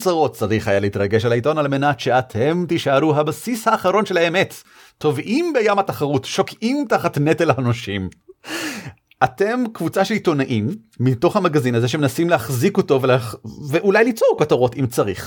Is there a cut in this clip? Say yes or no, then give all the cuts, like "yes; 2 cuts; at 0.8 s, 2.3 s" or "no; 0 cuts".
no; 0 cuts